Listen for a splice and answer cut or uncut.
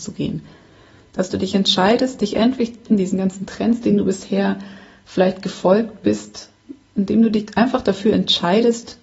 cut